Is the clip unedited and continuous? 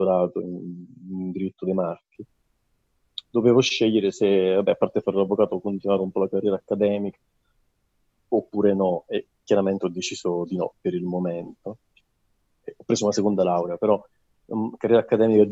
yes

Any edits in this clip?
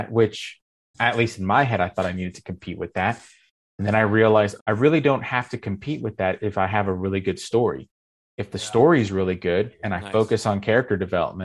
yes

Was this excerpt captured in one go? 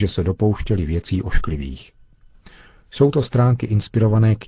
yes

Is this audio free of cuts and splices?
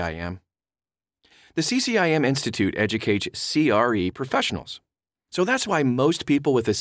yes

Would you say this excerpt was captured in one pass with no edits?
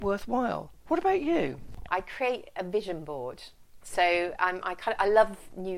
no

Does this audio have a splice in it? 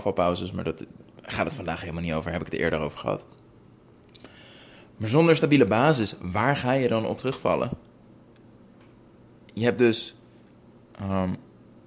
no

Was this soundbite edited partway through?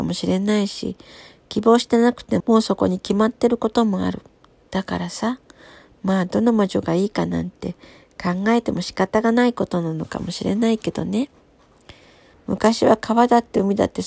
yes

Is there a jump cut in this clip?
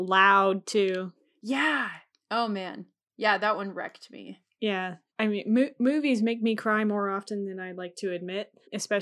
no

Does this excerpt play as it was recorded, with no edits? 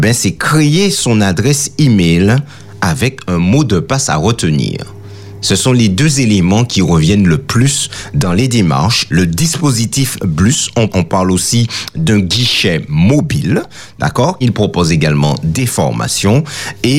no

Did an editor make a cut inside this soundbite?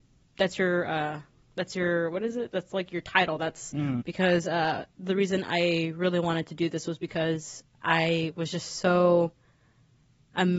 yes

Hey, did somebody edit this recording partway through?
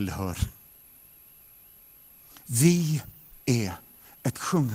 no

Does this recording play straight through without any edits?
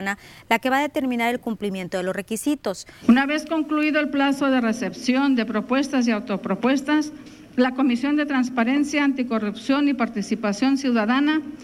no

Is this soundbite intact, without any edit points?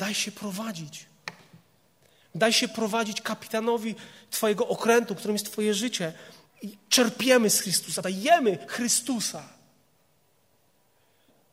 no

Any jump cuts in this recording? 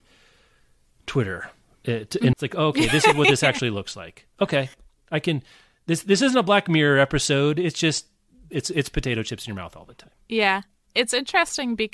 yes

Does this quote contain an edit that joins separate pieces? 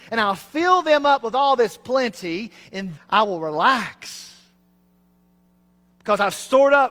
yes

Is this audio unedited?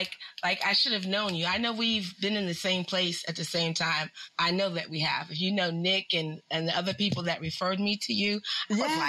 yes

